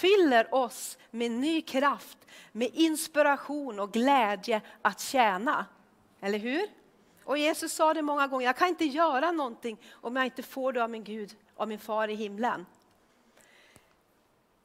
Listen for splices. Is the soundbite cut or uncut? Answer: uncut